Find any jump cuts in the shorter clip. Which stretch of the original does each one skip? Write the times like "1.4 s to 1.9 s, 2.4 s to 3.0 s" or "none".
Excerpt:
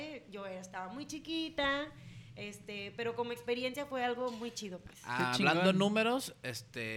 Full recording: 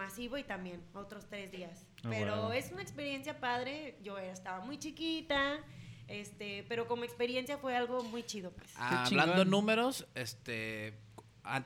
none